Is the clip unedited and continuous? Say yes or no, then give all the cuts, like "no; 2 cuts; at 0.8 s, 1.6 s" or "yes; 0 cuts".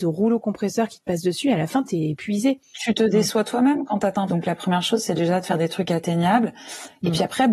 no; 2 cuts; at 2.7 s, 4.3 s